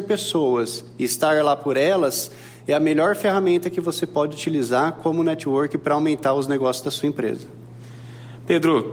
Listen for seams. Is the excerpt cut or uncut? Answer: uncut